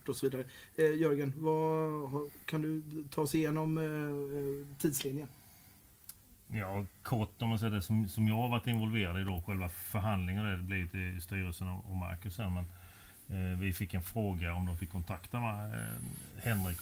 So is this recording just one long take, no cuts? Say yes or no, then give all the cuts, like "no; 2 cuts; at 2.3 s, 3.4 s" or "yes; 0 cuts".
yes; 0 cuts